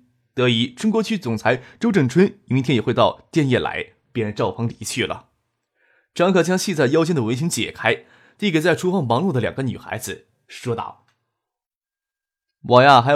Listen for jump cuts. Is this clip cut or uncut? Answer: uncut